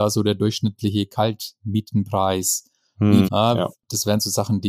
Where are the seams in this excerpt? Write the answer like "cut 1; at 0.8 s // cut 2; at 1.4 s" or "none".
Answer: cut 1; at 3.2 s